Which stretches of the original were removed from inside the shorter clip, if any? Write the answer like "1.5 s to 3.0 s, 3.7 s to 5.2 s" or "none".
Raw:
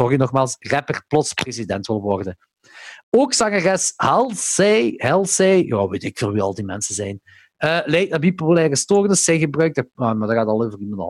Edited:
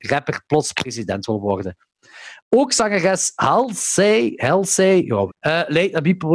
5.9 s to 7.5 s